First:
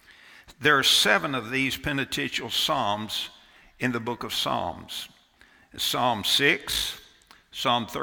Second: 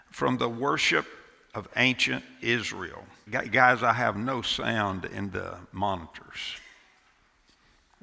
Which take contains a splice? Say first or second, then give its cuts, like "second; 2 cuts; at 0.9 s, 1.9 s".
second; 1 cut; at 3.3 s